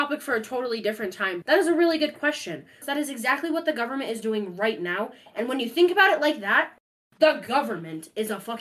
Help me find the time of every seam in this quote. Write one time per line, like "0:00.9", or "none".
0:01.4
0:02.8